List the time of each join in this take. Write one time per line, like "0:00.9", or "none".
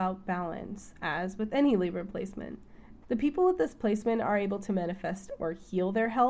0:03.0